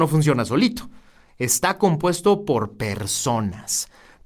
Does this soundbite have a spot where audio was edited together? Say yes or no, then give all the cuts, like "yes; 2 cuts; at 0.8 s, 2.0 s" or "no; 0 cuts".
no; 0 cuts